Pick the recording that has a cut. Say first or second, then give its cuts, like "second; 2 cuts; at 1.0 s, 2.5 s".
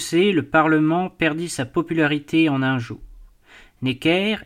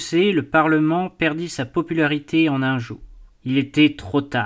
second; 1 cut; at 3.4 s